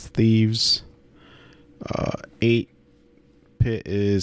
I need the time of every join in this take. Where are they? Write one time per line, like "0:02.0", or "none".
none